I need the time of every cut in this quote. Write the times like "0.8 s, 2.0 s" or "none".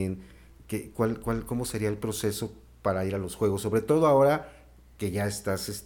none

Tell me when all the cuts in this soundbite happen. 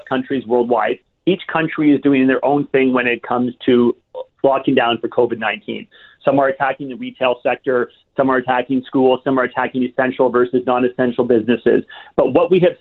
none

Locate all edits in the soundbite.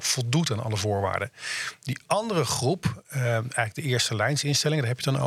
none

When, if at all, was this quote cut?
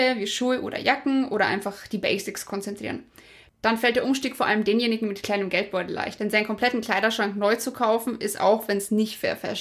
none

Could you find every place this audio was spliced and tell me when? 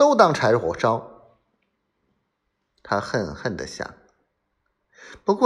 none

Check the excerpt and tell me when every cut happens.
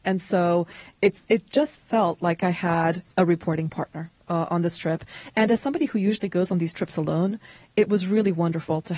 3.1 s

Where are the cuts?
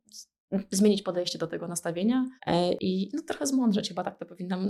2.4 s

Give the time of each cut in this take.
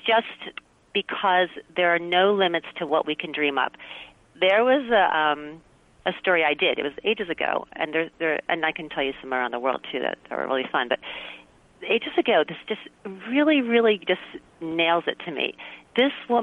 none

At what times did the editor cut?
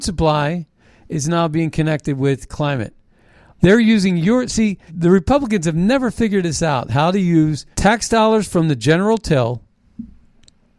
3.6 s, 4.9 s, 7.7 s

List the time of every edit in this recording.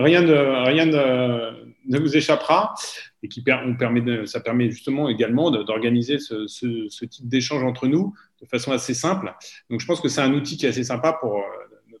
3.1 s

